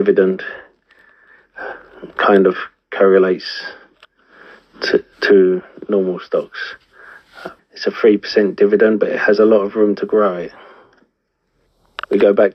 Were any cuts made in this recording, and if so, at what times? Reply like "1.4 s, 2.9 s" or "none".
5.1 s, 7.6 s